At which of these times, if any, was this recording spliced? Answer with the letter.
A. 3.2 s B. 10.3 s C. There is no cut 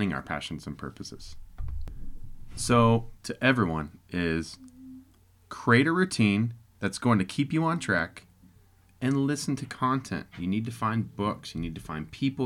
A